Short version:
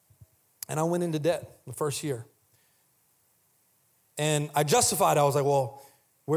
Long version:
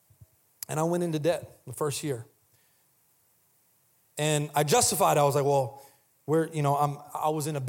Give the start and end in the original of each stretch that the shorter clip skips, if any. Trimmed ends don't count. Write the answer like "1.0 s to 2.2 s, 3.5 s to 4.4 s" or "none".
none